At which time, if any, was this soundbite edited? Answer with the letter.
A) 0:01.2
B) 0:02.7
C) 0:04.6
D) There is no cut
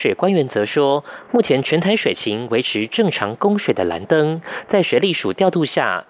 D